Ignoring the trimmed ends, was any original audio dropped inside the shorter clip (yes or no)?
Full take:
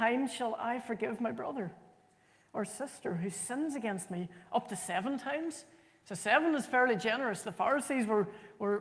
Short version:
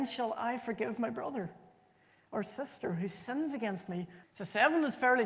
yes